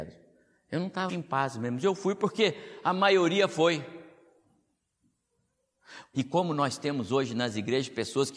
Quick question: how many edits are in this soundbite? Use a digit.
2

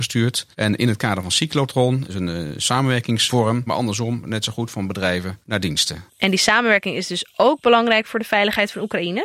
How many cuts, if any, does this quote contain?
2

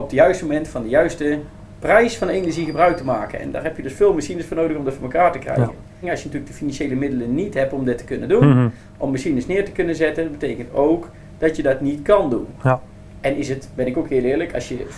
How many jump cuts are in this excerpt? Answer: 1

